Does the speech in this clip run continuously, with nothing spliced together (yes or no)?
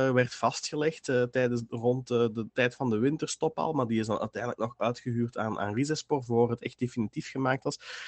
yes